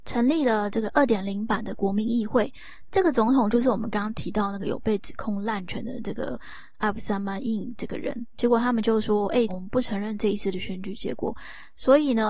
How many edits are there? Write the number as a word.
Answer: three